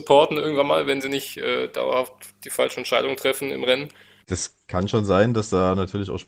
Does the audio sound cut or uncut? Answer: cut